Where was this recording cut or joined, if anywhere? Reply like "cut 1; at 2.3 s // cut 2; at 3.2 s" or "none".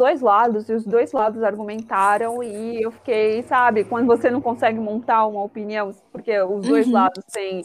none